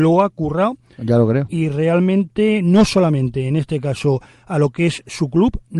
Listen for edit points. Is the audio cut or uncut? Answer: uncut